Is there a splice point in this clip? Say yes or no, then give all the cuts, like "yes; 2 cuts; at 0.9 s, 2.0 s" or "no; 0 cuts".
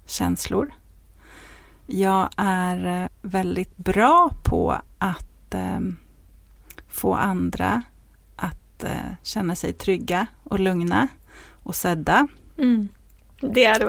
yes; 1 cut; at 3.0 s